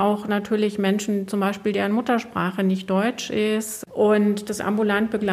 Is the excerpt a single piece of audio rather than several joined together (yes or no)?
no